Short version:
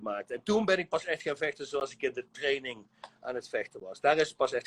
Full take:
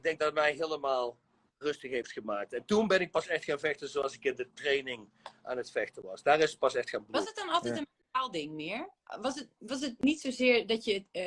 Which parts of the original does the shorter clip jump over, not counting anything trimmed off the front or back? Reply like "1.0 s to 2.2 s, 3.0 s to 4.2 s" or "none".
none